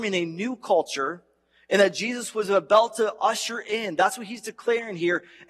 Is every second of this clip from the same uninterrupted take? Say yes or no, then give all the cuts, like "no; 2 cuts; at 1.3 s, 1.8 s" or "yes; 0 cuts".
yes; 0 cuts